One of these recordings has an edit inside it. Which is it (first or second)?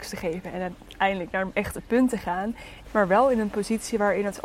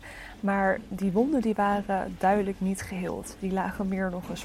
first